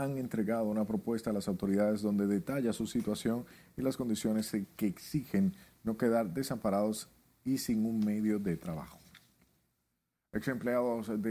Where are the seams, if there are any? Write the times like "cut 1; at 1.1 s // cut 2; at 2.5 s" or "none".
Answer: none

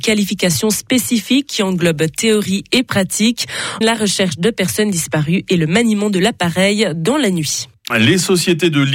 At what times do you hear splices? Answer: cut 1; at 3.8 s // cut 2; at 7.9 s

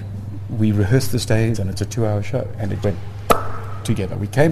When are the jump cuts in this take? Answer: cut 1; at 1.5 s // cut 2; at 2.8 s

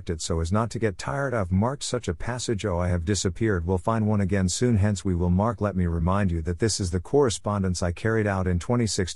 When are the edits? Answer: none

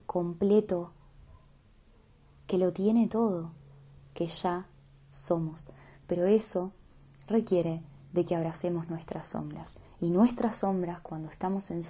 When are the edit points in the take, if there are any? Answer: none

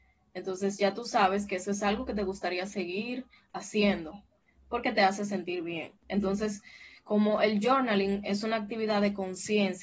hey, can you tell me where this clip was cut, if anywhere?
cut 1; at 6.0 s

